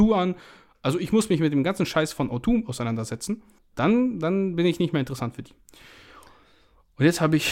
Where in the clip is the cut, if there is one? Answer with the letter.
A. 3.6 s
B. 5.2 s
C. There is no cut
A